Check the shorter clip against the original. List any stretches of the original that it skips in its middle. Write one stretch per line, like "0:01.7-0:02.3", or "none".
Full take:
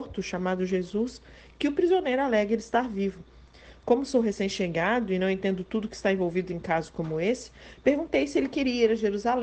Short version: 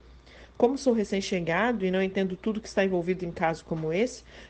none